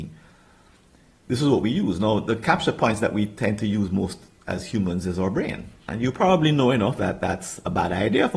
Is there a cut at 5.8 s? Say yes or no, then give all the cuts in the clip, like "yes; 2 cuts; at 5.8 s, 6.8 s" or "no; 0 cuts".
yes; 2 cuts; at 5.8 s, 7.0 s